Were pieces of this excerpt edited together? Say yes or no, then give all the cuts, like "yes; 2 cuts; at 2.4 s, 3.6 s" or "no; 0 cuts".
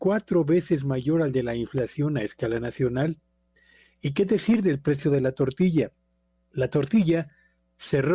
no; 0 cuts